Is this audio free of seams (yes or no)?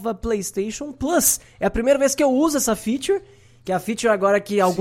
yes